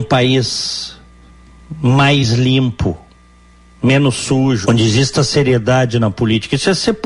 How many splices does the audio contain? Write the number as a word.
one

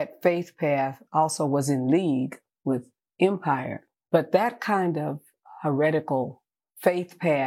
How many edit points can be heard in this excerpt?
one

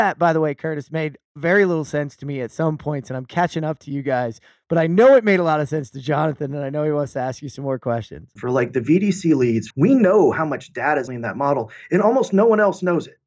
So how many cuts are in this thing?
three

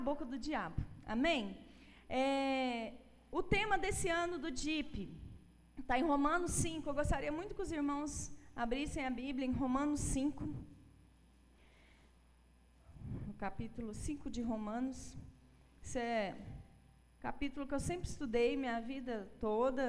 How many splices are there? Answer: zero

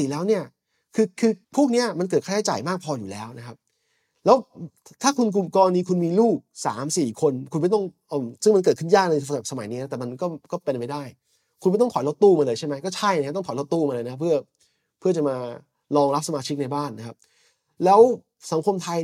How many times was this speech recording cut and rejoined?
one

